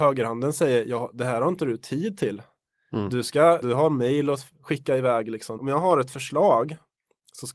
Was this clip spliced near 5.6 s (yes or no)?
yes